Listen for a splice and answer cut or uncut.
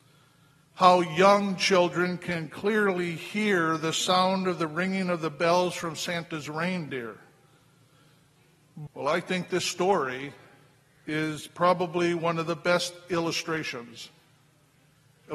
cut